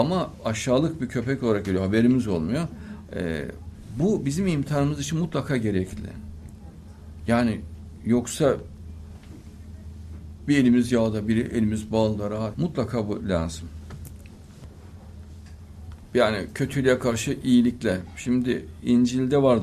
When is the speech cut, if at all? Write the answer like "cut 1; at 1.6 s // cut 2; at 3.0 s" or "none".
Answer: cut 1; at 3.1 s // cut 2; at 12.5 s